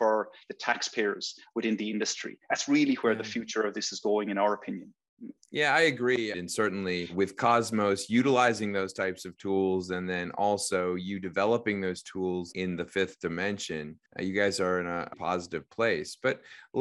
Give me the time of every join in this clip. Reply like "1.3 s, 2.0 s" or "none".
6.3 s, 14.1 s, 15.1 s